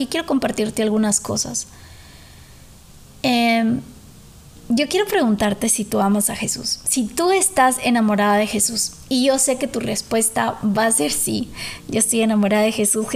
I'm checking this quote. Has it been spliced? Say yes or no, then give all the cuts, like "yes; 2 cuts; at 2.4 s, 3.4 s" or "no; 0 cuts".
no; 0 cuts